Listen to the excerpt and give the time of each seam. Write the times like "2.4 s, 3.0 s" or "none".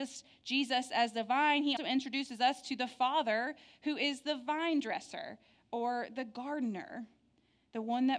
1.8 s